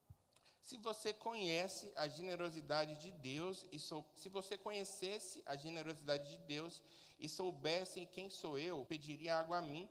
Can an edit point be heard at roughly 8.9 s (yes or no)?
yes